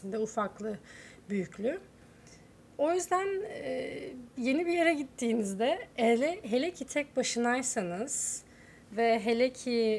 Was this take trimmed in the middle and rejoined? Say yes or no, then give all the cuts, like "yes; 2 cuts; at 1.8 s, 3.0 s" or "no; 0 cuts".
no; 0 cuts